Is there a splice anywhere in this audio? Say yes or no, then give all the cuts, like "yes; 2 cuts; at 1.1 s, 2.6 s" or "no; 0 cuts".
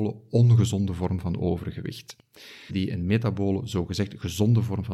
yes; 1 cut; at 2.7 s